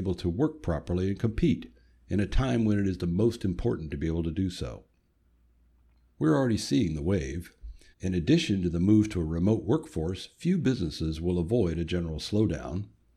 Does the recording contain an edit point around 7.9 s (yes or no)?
yes